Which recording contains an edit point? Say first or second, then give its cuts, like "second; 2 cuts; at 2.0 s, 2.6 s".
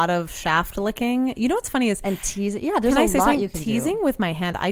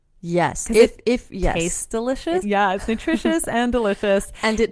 second; 1 cut; at 2.4 s